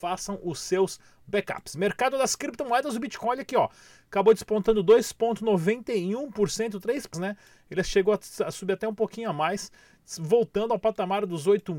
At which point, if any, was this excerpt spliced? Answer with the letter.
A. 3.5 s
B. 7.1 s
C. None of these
B